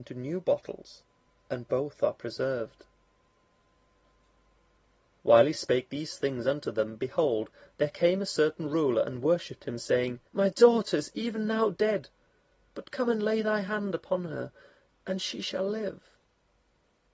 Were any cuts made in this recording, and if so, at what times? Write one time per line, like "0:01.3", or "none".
0:10.3